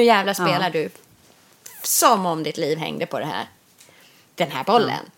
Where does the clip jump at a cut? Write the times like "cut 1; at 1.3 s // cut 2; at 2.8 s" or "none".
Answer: none